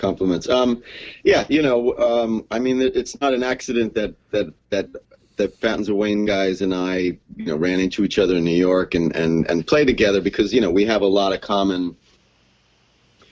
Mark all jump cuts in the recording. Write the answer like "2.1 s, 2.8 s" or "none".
none